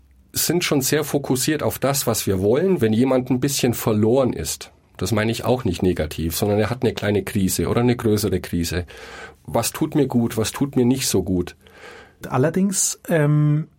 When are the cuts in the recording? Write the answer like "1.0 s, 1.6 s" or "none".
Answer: 2.8 s, 9.3 s, 12.2 s